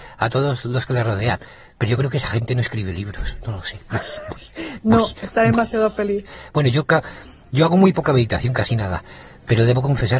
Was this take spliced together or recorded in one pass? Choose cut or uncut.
uncut